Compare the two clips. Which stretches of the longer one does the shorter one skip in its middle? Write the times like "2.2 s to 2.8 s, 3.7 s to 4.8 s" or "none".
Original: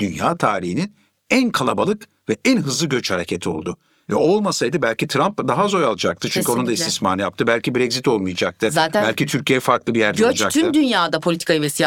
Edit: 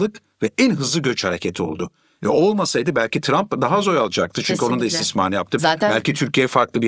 7.4 s to 8.7 s

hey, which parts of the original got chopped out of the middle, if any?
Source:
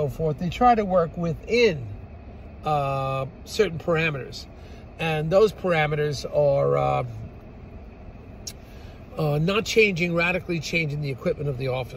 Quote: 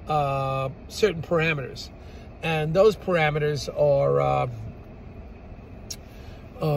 none

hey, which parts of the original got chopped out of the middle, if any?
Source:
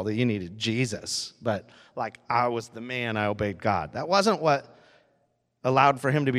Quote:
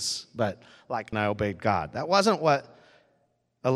2.2 s to 3.1 s

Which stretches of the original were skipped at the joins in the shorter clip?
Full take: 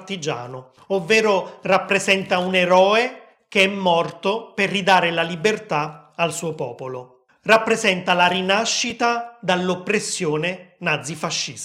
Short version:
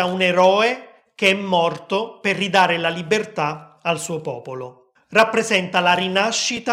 none

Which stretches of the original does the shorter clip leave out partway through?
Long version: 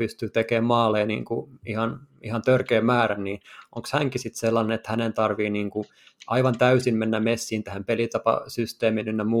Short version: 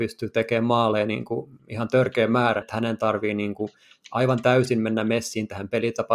1.6 s to 2.1 s, 3.2 s to 4.8 s

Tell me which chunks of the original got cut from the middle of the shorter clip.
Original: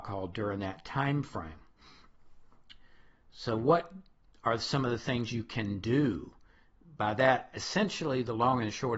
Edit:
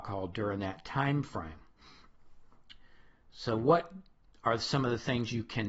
none

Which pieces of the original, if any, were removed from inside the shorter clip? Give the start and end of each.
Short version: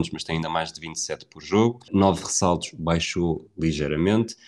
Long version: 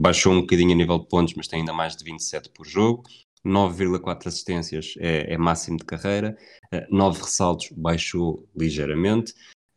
3.1 s to 6.9 s

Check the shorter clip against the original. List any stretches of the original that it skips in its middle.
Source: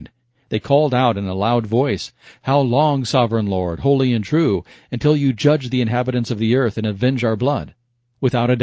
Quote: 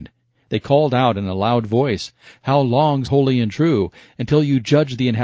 3.0 s to 3.8 s

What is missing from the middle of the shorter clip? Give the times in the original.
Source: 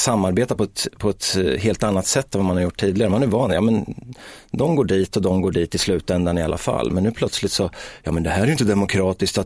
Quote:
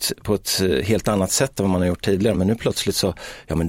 3.1 s to 6.9 s

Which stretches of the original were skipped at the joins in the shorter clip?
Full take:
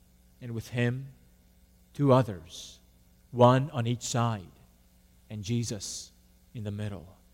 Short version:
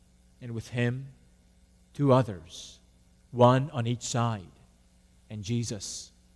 none

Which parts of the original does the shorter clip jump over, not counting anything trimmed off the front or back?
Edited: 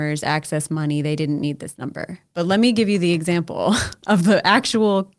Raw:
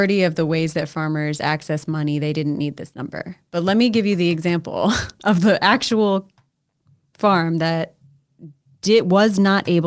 none

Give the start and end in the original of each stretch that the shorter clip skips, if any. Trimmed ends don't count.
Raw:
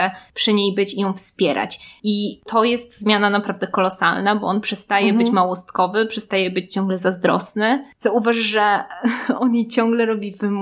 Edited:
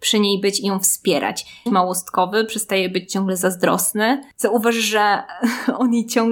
2.0 s to 5.3 s

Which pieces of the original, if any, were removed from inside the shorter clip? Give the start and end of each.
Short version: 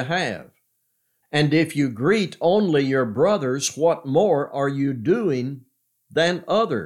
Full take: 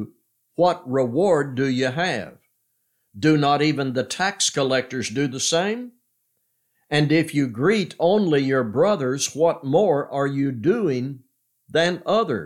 3.1 s to 6.8 s

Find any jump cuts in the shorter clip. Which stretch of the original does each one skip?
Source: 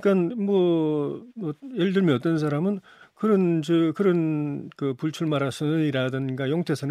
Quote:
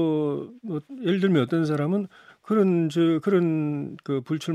none

